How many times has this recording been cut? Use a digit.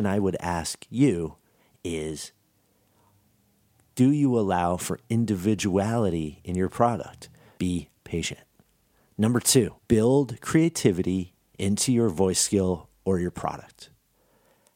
2